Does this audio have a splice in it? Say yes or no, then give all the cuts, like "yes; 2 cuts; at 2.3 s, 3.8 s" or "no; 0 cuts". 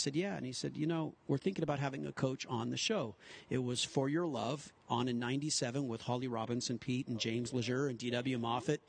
no; 0 cuts